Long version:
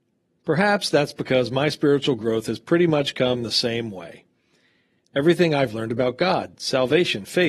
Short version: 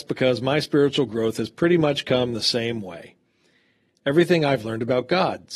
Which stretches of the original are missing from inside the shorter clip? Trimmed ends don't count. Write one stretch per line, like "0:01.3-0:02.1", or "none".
none